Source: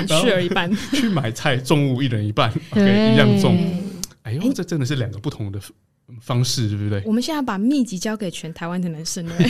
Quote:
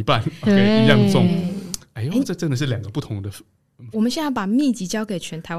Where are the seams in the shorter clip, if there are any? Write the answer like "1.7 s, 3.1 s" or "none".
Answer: 3.9 s